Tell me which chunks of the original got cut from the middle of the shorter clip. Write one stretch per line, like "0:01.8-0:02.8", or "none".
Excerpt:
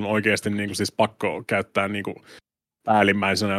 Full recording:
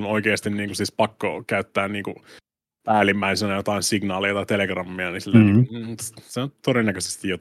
none